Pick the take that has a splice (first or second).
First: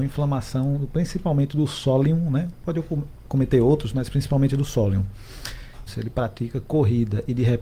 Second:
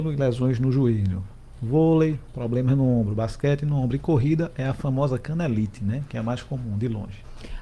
first